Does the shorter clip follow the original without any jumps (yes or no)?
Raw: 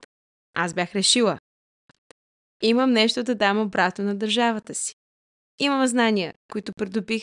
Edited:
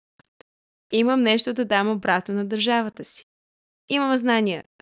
yes